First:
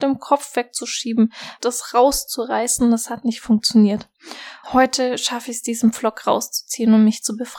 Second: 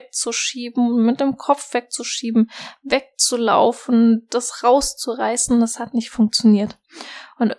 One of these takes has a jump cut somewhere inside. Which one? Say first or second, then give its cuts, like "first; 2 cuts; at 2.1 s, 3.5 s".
first; 2 cuts; at 1.6 s, 4.6 s